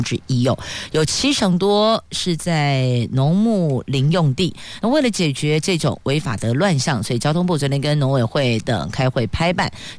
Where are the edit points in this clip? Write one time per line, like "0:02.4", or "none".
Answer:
none

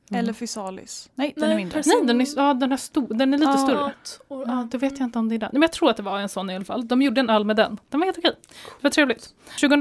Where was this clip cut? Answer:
0:03.9

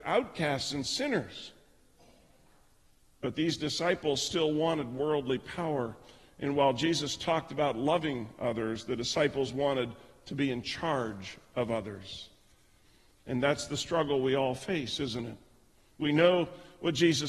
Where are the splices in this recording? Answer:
none

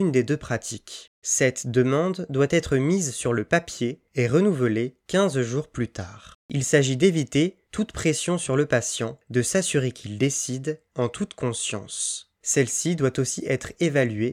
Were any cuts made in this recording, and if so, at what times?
0:12.4

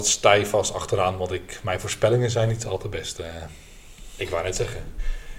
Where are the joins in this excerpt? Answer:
0:04.2

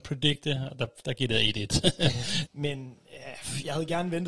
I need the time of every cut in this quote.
0:02.5

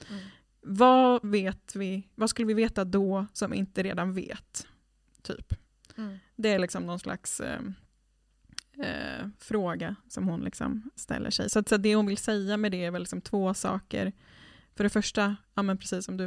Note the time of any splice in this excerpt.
0:11.0

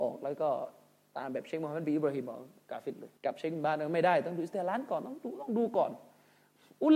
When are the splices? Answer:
0:03.2

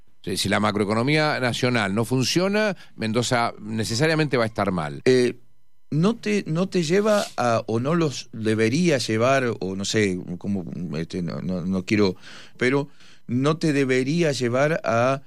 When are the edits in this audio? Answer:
0:05.0
0:12.5

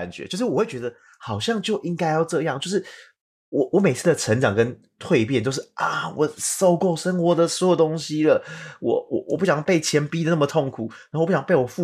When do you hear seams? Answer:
none

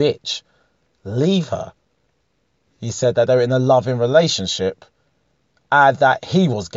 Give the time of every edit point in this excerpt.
0:02.6

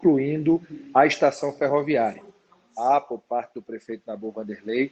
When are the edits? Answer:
none

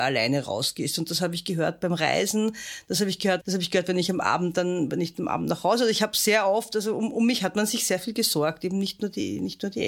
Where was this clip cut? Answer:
0:03.4

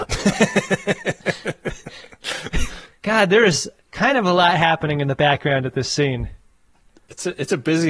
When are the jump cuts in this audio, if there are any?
none

